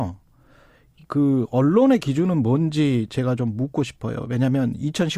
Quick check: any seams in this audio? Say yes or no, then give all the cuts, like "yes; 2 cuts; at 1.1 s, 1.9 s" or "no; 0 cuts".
no; 0 cuts